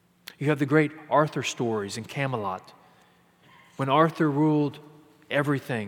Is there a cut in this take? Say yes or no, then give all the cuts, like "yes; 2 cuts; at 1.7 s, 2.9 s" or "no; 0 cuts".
no; 0 cuts